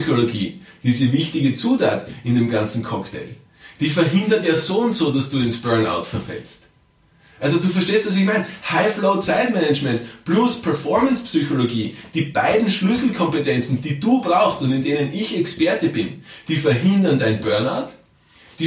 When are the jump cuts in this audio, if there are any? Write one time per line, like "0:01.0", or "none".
none